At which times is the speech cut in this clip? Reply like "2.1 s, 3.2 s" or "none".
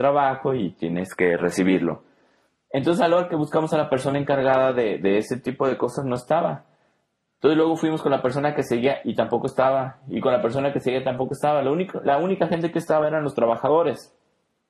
none